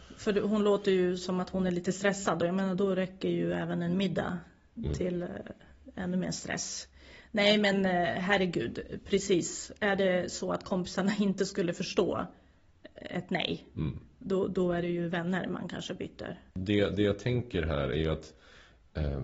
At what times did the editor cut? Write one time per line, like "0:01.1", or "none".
0:16.5